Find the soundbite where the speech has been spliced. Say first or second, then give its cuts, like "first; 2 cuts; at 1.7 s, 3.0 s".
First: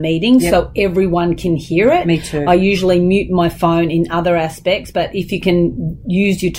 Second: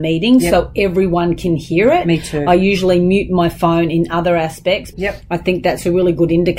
second; 1 cut; at 4.9 s